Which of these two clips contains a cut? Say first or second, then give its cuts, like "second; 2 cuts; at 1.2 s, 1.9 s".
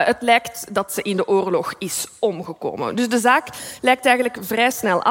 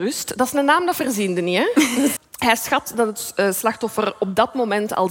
second; 1 cut; at 2.2 s